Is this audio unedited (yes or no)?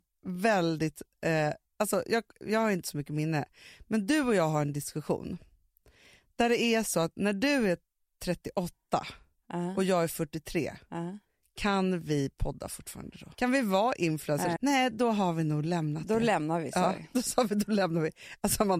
no